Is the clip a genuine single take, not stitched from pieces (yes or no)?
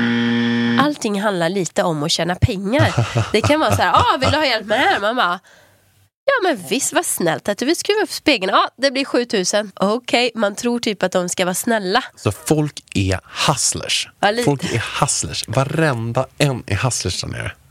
no